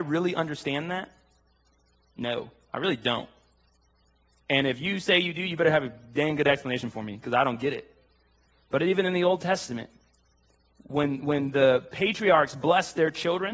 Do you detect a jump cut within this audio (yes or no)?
no